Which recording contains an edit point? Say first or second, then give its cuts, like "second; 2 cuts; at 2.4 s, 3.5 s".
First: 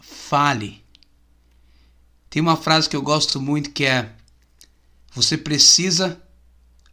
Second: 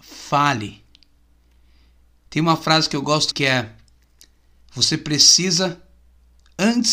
second; 1 cut; at 3.3 s